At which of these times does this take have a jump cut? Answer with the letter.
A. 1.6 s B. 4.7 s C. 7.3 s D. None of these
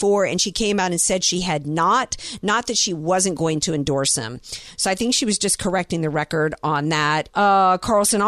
C